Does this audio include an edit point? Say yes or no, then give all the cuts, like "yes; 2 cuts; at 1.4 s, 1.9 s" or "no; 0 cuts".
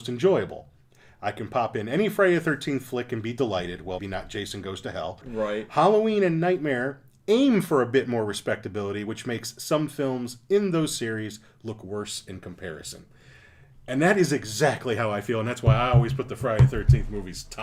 yes; 2 cuts; at 4.0 s, 5.2 s